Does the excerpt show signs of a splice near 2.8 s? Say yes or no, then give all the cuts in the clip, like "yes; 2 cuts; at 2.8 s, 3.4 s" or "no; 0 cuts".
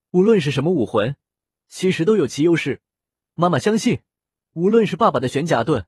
no; 0 cuts